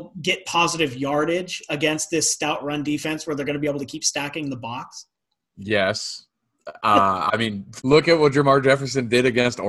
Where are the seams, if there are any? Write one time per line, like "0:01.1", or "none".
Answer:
0:07.8